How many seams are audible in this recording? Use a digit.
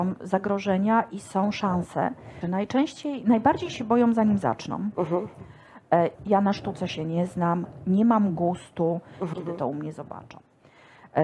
3